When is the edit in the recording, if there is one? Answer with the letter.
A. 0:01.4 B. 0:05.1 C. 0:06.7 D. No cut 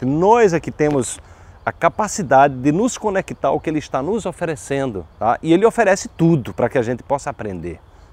B